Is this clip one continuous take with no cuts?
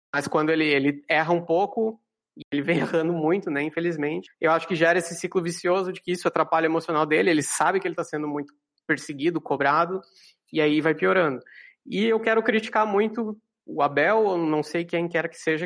yes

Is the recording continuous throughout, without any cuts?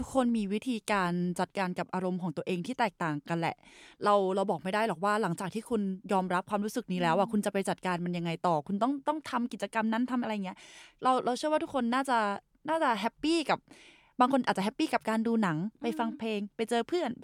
yes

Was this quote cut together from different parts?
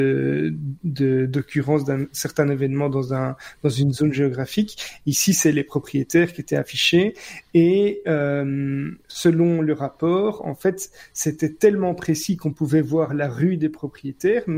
no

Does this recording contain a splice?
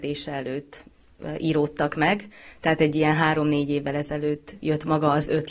no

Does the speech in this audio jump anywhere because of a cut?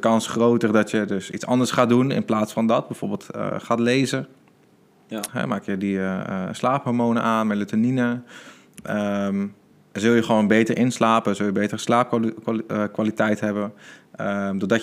yes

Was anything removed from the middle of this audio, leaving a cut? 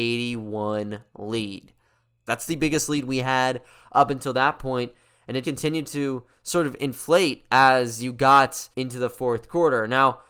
yes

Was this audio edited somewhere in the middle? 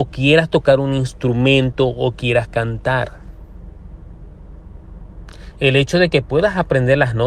no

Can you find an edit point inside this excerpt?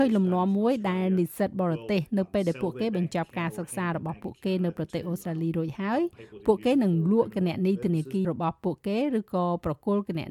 yes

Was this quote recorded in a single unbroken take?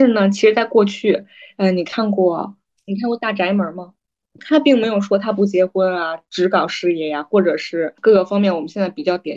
no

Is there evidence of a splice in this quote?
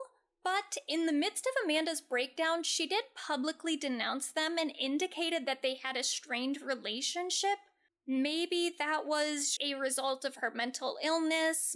yes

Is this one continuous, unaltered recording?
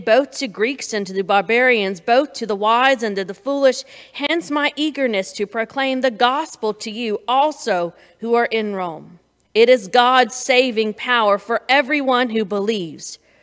no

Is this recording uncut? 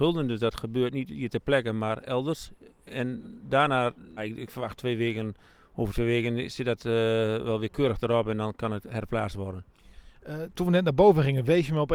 no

